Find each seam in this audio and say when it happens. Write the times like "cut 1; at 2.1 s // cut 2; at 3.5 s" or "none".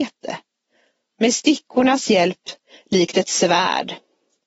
cut 1; at 1.1 s